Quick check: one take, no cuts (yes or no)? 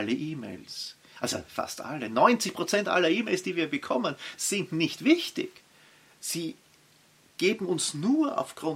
yes